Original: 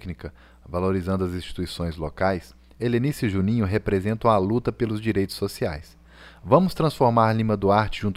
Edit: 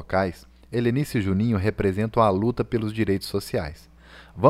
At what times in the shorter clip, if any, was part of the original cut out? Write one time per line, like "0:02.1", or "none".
none